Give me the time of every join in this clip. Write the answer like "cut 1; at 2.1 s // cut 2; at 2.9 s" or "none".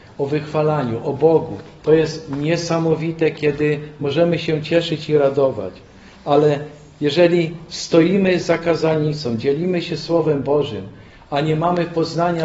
none